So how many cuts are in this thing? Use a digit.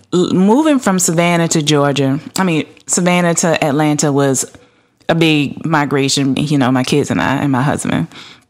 1